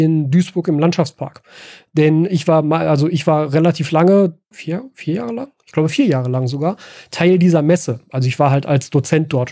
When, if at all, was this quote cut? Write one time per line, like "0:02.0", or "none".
0:04.5